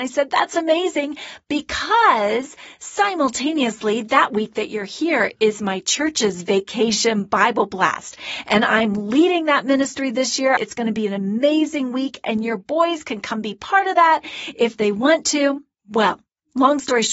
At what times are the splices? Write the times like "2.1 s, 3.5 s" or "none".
10.6 s